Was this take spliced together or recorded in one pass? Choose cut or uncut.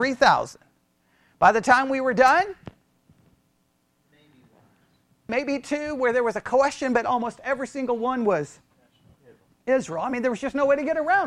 cut